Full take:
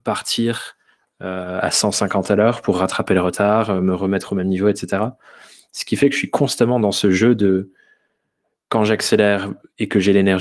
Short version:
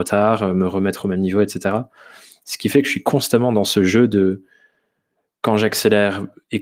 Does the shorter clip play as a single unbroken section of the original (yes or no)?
yes